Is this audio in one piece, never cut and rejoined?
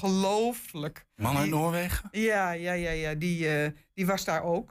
yes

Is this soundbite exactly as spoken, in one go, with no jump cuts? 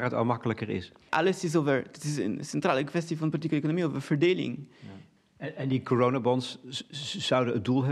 no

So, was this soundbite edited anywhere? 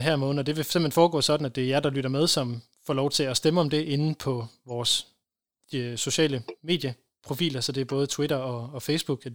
no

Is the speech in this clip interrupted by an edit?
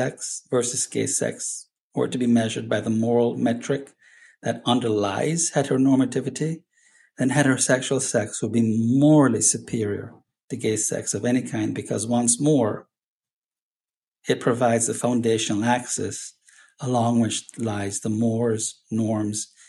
yes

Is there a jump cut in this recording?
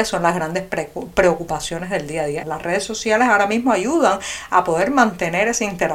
yes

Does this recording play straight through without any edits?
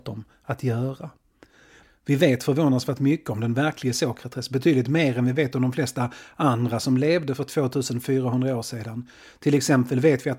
yes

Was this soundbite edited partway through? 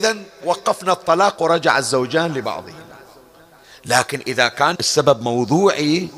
yes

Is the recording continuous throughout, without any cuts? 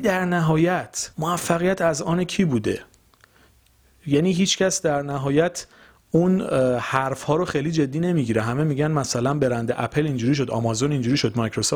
no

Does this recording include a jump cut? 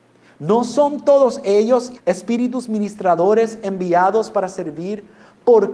yes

